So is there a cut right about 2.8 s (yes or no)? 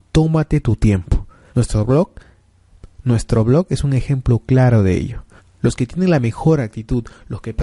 no